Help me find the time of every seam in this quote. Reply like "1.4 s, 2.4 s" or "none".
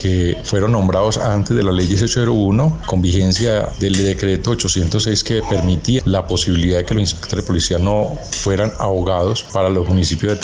6.0 s